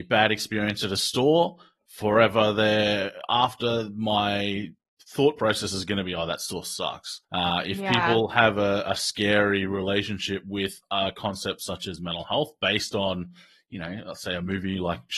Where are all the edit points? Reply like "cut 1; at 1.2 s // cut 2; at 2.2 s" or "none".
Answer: cut 1; at 7.2 s